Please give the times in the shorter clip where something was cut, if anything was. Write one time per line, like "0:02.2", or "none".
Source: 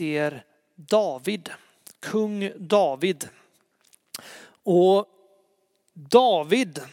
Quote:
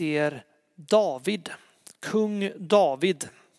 none